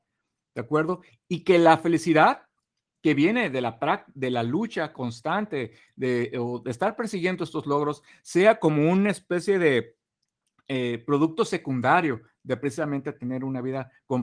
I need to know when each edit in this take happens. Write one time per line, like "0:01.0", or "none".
none